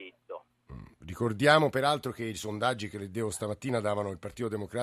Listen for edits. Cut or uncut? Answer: uncut